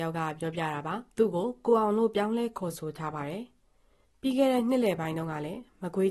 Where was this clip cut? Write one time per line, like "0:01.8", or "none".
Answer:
0:01.1